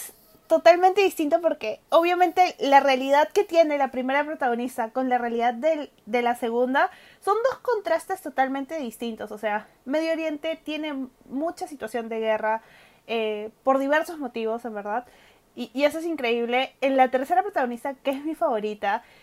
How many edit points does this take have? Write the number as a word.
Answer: one